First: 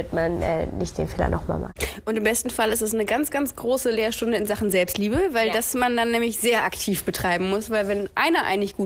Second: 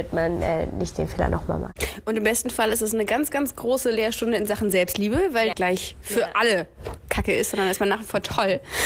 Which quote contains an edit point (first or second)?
second